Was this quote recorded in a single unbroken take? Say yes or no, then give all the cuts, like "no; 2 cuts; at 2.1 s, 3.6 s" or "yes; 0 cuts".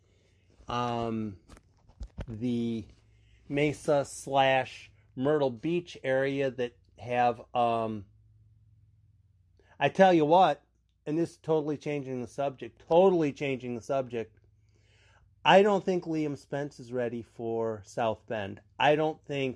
yes; 0 cuts